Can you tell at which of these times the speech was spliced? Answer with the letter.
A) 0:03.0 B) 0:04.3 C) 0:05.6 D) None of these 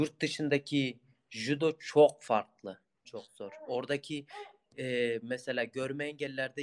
A